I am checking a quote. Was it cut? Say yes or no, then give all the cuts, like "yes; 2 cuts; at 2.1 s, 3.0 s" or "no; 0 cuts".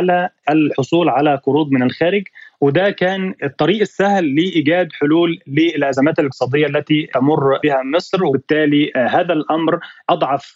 no; 0 cuts